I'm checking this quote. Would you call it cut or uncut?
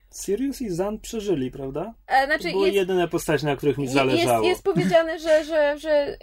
cut